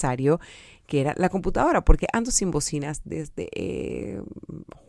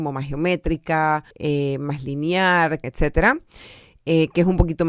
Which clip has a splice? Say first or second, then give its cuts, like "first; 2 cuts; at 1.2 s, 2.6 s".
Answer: second; 2 cuts; at 1.3 s, 2.8 s